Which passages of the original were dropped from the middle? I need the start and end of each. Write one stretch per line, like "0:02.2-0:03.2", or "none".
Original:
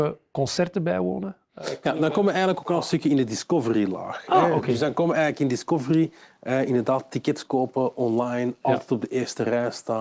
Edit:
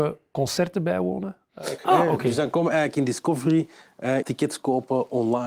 0:01.8-0:04.2
0:06.7-0:07.1